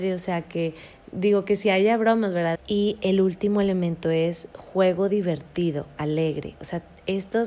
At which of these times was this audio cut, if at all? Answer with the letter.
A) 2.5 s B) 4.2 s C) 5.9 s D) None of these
A